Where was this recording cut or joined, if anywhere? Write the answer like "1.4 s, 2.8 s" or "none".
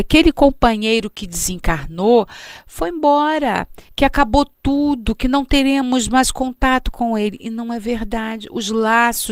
3.9 s